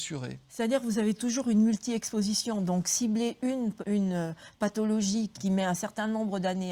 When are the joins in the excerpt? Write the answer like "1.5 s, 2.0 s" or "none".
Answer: 3.8 s, 5.3 s